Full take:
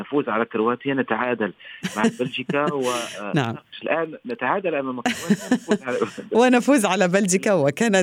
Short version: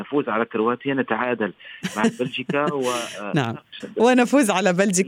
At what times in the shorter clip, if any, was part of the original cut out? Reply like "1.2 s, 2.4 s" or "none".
3.8 s

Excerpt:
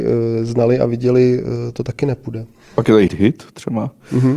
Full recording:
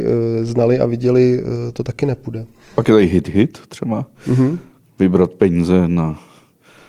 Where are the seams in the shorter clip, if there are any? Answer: 3.1 s

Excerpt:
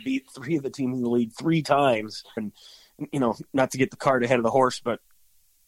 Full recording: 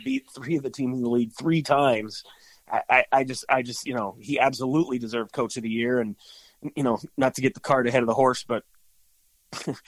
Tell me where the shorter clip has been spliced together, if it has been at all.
2.4 s

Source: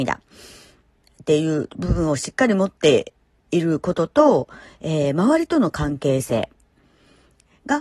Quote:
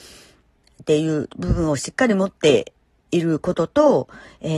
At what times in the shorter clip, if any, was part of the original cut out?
none

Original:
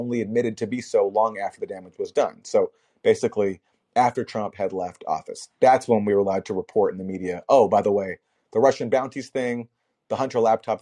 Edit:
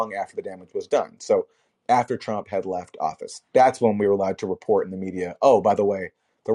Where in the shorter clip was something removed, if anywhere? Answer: 1.7 s

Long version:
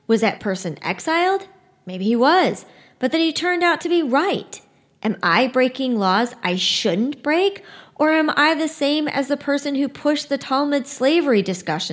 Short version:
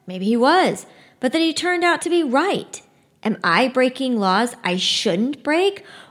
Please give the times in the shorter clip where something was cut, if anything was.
none

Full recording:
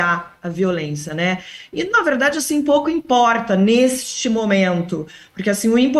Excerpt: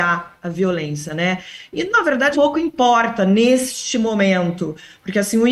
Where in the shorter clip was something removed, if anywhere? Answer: 2.3 s

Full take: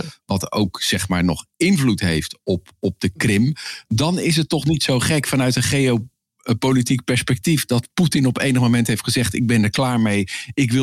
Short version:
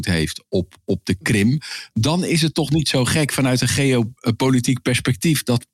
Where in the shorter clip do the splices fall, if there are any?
4.2 s

